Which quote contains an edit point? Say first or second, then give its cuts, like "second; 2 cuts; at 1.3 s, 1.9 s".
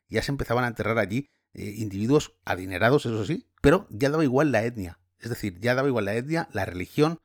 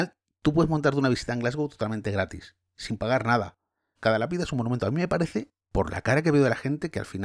second; 1 cut; at 4.0 s